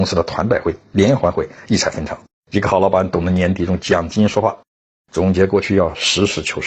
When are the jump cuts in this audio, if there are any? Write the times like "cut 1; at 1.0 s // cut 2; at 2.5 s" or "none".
cut 1; at 2.3 s // cut 2; at 4.9 s